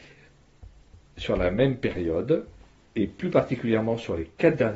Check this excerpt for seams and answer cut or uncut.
uncut